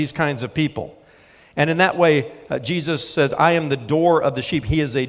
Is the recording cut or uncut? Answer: uncut